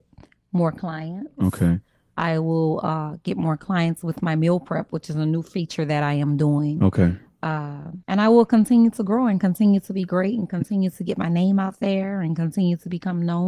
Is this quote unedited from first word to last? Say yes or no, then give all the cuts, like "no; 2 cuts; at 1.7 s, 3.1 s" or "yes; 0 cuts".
no; 1 cut; at 8.0 s